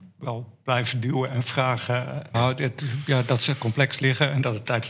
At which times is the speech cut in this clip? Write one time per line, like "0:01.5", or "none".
0:02.3